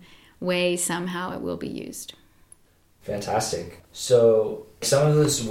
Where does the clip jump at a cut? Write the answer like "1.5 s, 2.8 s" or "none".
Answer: none